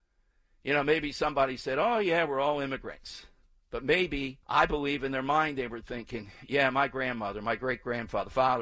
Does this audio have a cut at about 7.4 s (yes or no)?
no